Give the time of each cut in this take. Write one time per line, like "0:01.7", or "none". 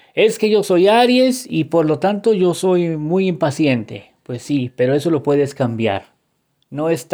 none